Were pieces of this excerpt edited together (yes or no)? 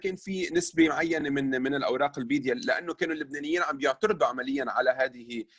no